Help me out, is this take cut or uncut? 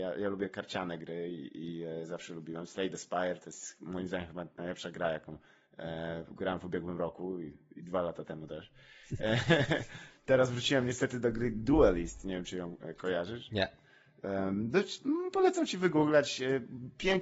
uncut